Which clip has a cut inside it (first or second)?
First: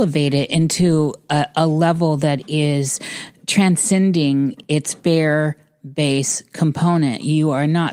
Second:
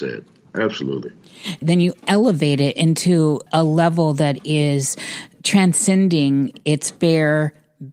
second